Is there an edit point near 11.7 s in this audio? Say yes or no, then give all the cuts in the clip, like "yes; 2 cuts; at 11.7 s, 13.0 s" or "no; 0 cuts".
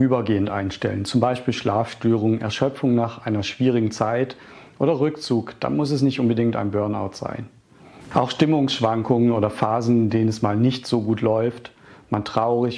no; 0 cuts